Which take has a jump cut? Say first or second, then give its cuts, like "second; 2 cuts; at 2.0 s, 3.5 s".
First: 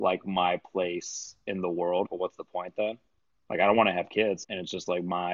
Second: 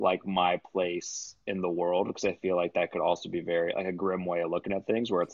first; 2 cuts; at 2.0 s, 4.4 s